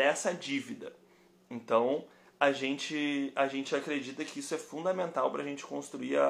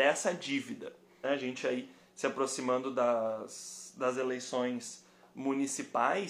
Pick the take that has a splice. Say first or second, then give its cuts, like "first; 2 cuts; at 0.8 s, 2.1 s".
second; 1 cut; at 1.2 s